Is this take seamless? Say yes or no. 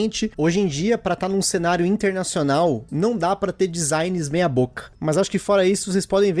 no